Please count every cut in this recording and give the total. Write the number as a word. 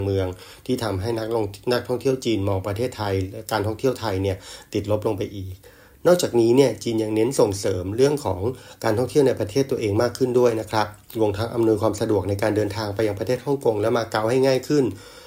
zero